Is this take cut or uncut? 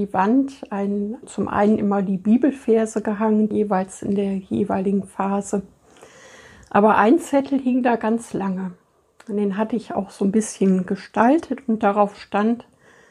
cut